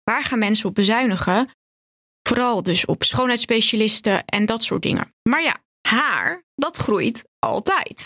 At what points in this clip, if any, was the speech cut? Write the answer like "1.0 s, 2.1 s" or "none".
none